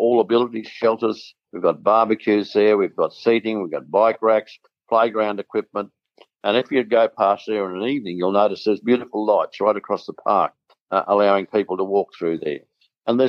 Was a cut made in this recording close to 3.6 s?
no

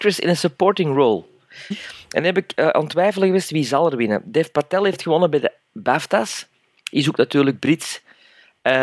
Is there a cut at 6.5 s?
no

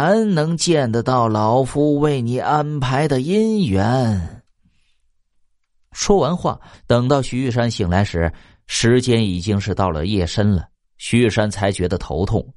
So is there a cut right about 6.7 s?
yes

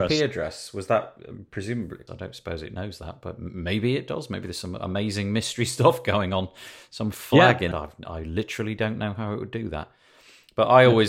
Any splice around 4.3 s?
no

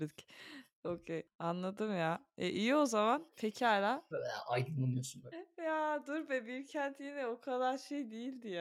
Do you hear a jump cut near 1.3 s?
no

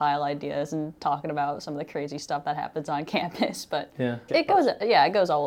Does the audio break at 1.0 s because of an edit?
no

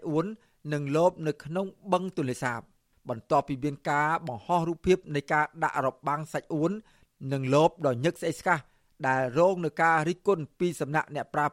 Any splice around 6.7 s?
no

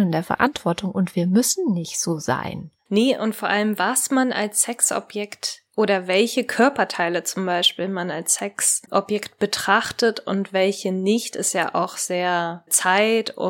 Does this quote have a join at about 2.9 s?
yes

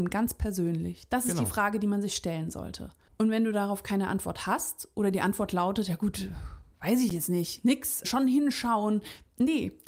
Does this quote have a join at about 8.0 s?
yes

